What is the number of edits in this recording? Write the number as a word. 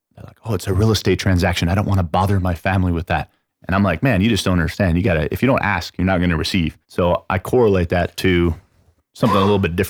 two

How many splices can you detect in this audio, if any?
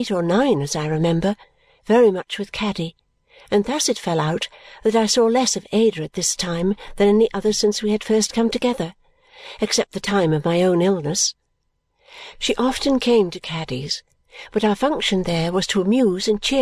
zero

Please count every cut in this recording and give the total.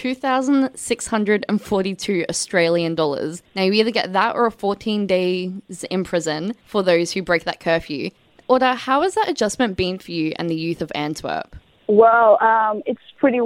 zero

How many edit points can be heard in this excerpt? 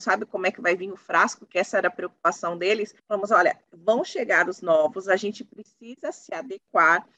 one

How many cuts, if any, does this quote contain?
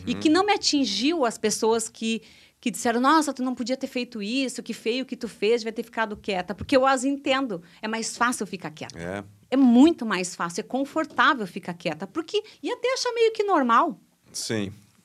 one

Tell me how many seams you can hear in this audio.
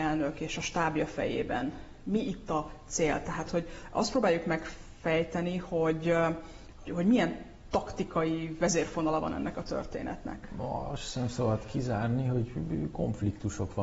one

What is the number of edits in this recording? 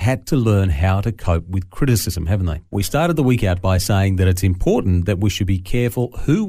one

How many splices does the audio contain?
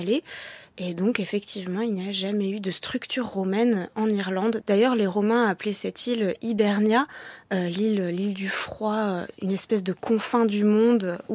one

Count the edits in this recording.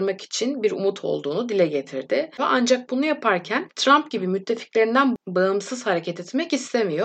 one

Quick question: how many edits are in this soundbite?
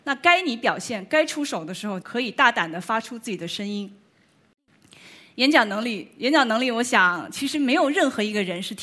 one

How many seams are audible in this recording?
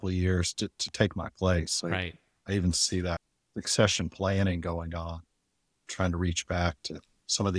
zero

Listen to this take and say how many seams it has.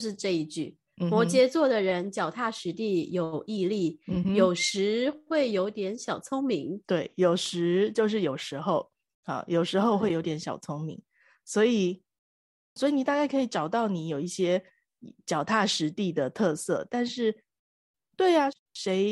one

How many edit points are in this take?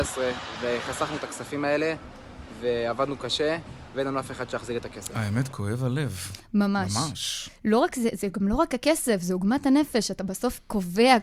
zero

